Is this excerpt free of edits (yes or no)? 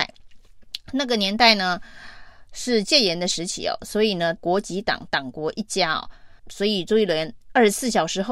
no